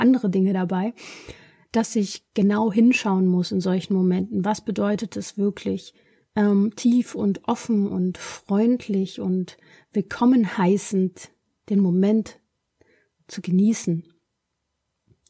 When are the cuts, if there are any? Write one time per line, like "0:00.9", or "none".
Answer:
none